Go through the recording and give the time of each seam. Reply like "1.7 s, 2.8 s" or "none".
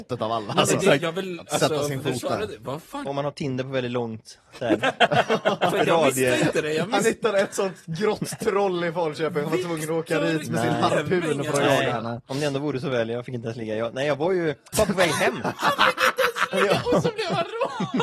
1.0 s, 3.0 s